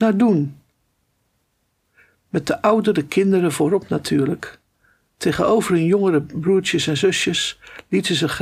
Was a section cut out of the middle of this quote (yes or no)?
no